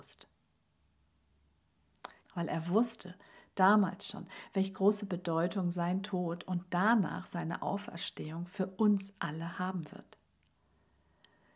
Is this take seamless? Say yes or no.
no